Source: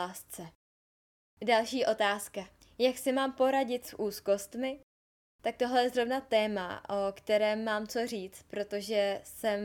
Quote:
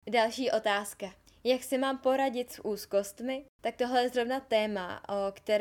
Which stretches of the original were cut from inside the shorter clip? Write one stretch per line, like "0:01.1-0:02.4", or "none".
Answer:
0:04.9-0:05.3